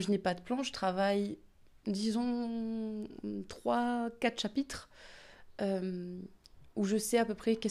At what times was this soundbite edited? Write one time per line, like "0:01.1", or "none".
none